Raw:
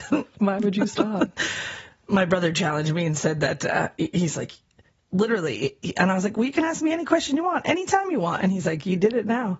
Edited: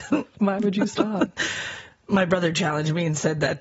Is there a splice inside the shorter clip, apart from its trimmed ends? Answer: no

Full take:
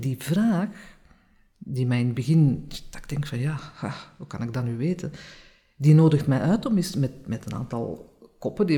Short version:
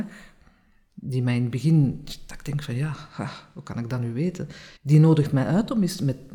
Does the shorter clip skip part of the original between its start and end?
yes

